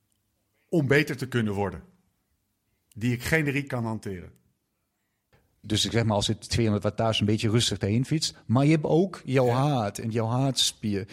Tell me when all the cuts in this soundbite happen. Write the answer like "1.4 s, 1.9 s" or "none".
5.6 s